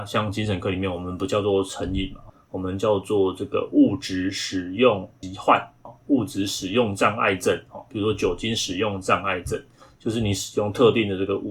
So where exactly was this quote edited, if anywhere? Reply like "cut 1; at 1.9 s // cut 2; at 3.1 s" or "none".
none